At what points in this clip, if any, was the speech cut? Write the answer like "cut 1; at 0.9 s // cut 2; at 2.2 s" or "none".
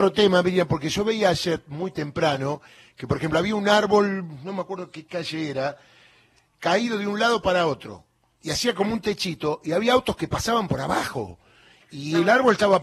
none